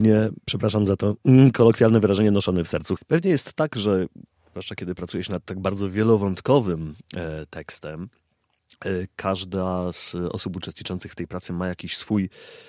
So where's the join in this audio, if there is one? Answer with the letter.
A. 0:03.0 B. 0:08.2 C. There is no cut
A